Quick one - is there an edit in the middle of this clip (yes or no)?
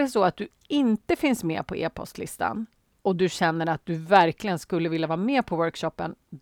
no